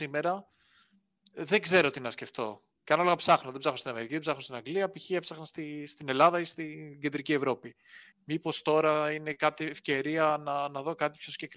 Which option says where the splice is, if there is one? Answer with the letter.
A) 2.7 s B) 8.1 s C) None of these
B